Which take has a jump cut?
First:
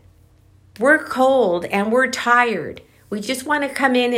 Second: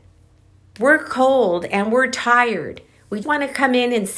second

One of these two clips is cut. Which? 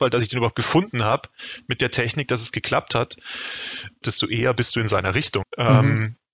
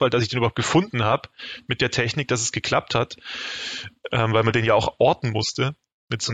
first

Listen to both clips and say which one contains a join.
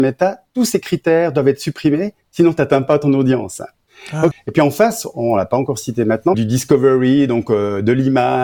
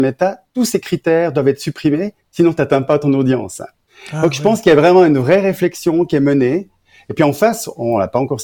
first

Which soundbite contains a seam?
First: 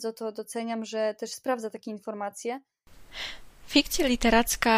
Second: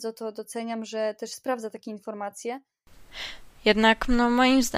second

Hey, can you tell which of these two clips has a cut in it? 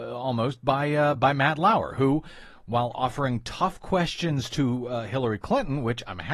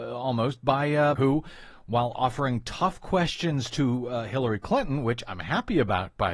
second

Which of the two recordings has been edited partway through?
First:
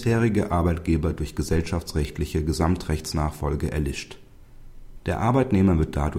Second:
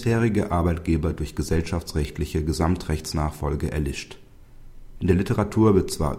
first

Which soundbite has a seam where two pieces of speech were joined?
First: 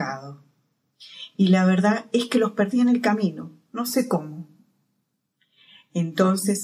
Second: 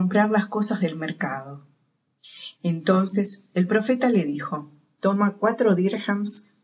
second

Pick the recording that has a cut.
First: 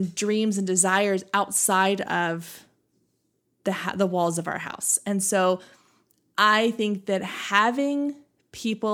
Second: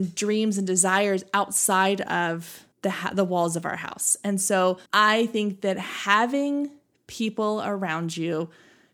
second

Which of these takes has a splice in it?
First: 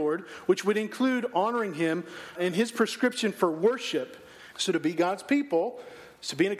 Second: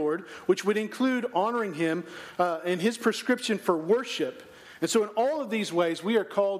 first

